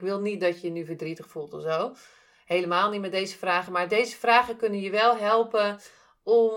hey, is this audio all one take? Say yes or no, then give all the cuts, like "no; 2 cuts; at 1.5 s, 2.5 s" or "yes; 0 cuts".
yes; 0 cuts